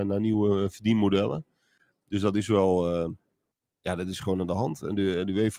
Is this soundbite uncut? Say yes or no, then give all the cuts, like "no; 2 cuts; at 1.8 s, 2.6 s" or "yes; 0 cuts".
yes; 0 cuts